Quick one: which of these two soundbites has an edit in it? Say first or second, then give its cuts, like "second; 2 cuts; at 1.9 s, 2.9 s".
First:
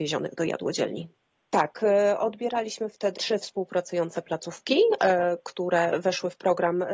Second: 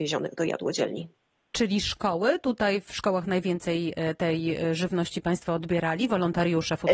first; 2 cuts; at 1.4 s, 3.2 s